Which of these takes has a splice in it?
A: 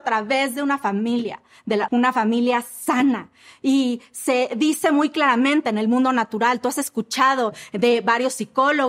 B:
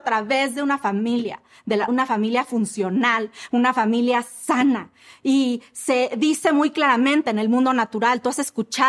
A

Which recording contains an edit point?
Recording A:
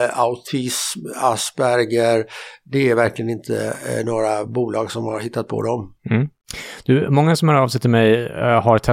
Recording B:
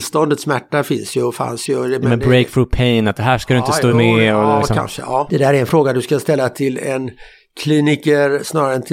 B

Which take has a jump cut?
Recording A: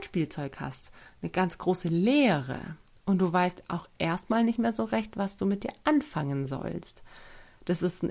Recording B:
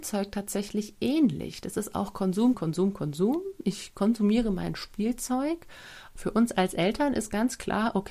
B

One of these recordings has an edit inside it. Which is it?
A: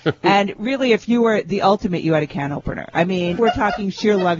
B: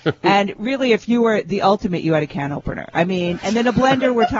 A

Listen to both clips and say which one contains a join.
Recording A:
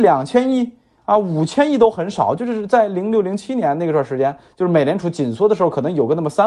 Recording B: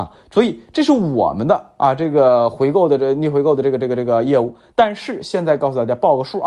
B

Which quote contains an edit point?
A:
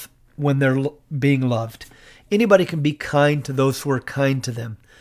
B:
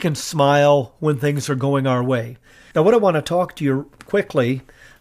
B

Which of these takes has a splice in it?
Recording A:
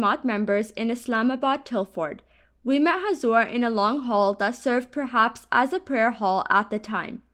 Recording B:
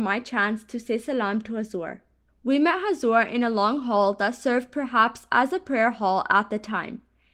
B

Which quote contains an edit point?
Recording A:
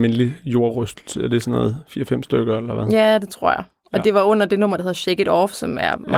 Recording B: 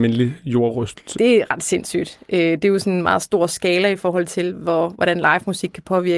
B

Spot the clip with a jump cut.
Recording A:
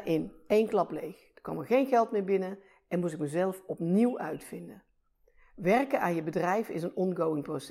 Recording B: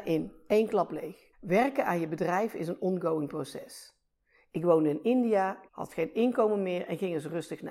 B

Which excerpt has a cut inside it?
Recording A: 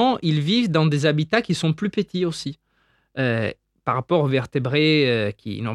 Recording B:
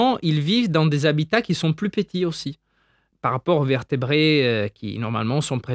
B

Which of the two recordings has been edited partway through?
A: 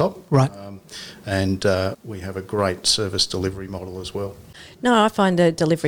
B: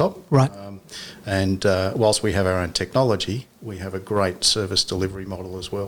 A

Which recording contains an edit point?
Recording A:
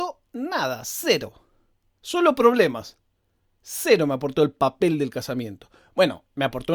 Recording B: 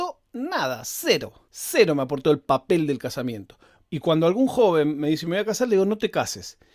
B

